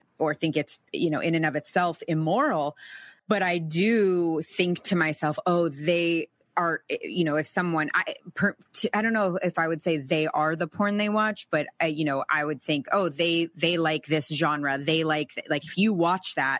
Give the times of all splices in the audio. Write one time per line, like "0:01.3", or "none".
none